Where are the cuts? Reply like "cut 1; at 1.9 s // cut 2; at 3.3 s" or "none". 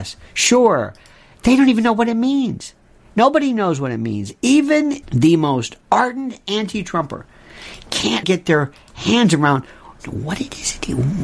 cut 1; at 5.0 s // cut 2; at 8.2 s

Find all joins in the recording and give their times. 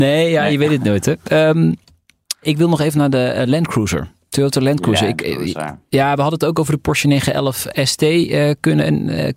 none

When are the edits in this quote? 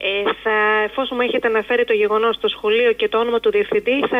none

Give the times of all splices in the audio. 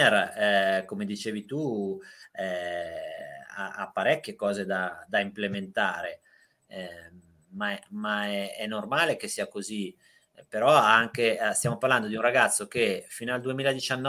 none

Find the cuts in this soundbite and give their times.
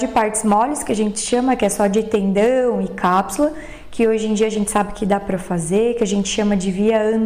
none

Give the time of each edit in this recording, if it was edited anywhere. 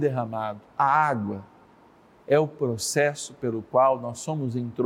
none

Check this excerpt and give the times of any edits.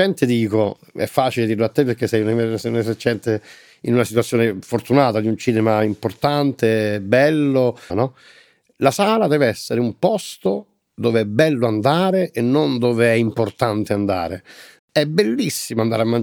cut 1; at 7.9 s // cut 2; at 14.8 s

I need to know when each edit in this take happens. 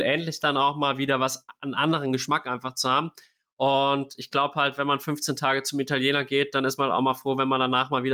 none

